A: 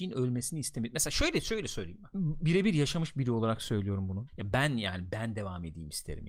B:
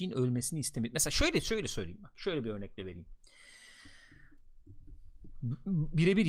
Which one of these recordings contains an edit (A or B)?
A